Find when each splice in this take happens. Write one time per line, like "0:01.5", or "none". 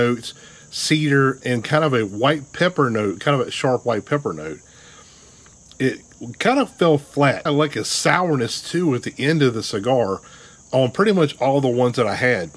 0:07.5